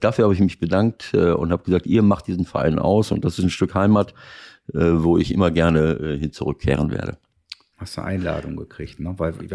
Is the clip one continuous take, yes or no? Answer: no